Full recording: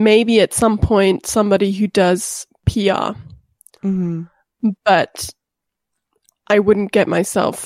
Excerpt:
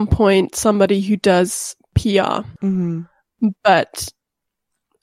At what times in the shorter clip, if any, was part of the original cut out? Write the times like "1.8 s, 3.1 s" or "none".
2.6 s